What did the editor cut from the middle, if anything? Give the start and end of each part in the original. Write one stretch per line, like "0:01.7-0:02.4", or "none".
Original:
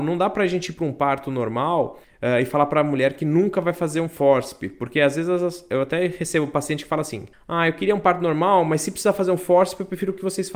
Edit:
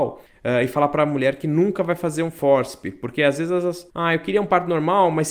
0:05.7-0:07.4